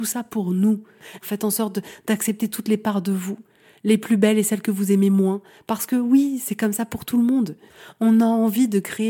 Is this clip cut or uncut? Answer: cut